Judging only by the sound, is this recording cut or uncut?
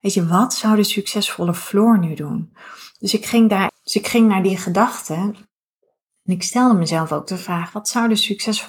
cut